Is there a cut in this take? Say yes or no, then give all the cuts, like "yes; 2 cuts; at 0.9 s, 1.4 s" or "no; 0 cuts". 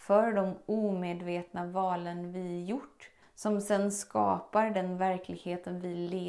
yes; 1 cut; at 3.2 s